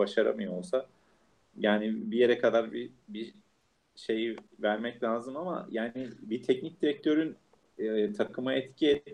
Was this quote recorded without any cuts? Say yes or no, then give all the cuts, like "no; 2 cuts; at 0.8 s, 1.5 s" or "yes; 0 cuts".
yes; 0 cuts